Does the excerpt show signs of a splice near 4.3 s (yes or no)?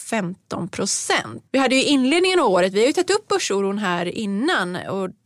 no